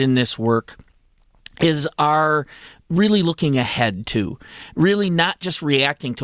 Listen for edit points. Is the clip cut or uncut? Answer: uncut